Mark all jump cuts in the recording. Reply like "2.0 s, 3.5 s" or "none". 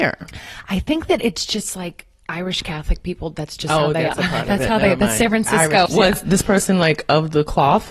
5.9 s